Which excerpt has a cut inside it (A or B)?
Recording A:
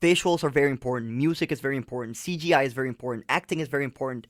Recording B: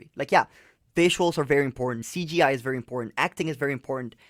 B